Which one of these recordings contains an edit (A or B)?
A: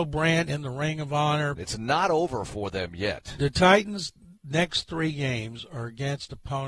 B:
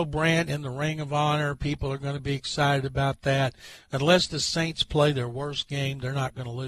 A